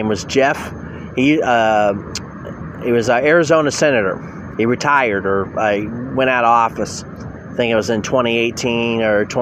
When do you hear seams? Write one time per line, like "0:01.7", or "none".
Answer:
none